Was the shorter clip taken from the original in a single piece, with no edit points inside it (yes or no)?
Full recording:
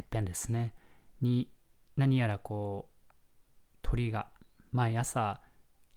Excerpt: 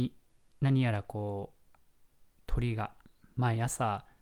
yes